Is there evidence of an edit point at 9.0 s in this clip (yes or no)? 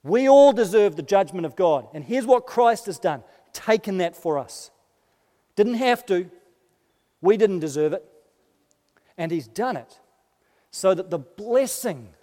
yes